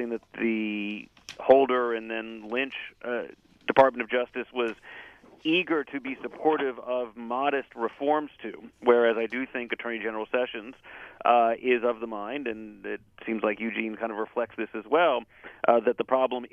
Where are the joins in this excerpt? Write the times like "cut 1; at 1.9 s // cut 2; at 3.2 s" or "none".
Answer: none